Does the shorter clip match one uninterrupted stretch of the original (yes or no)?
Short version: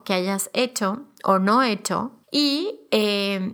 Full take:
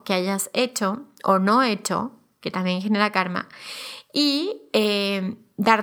no